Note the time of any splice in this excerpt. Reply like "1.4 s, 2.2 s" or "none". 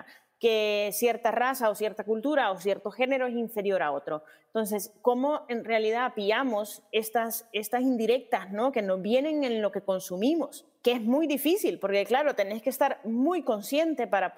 none